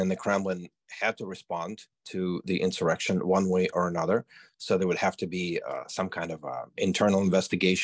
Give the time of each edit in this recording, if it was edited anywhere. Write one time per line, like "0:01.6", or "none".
none